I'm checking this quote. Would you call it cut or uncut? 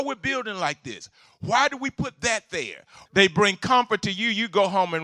cut